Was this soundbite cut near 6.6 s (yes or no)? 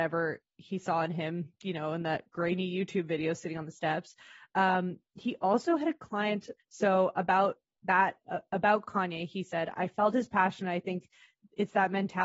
yes